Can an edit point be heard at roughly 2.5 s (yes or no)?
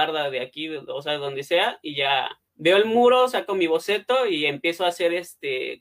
yes